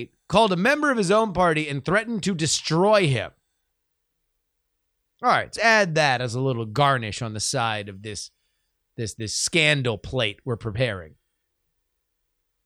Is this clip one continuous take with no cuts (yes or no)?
no